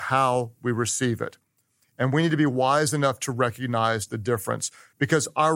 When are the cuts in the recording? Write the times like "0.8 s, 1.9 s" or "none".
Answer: 1.8 s